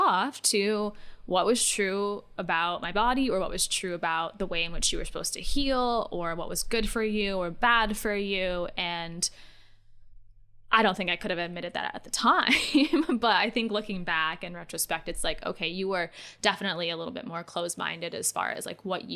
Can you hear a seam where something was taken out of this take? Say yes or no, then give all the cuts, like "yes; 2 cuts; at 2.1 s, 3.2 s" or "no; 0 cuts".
no; 0 cuts